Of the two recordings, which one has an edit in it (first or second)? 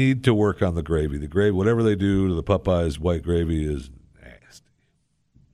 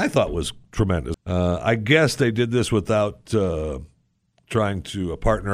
second